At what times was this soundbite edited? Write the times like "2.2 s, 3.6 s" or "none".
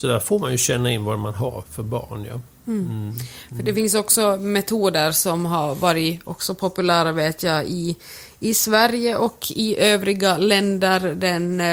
1.6 s